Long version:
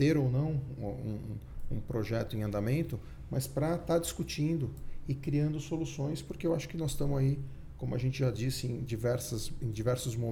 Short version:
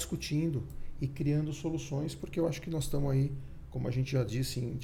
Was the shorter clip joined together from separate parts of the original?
no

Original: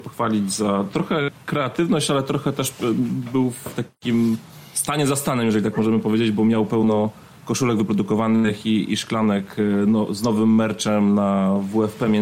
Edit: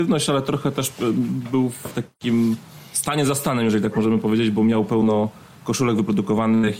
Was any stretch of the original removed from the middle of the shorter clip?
no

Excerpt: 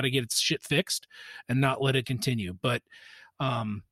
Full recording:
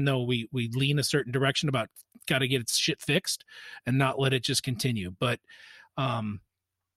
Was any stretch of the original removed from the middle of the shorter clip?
yes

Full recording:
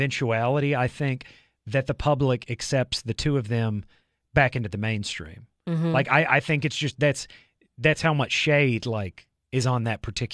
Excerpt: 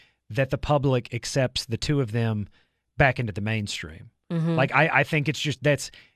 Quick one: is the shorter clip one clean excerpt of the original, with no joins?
yes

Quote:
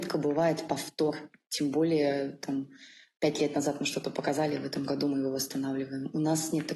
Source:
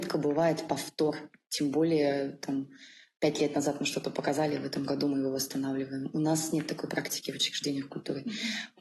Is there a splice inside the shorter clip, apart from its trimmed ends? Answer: no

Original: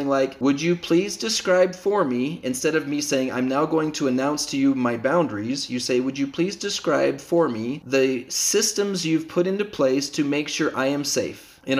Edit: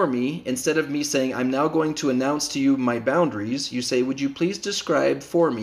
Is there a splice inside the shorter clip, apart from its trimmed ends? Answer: no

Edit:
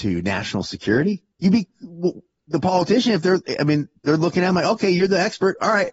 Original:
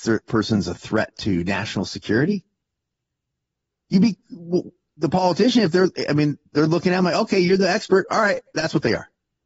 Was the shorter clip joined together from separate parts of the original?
yes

